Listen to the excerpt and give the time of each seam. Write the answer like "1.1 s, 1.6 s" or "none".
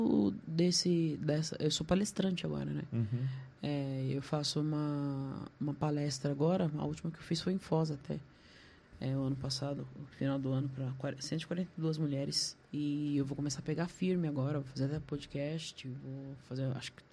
12.6 s